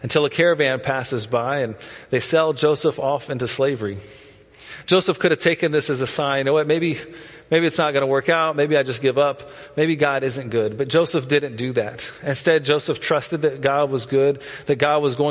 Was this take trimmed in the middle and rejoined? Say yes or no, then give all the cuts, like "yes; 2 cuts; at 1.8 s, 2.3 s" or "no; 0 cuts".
no; 0 cuts